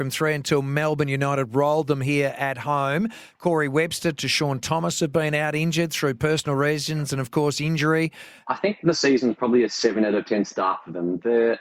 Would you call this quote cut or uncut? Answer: cut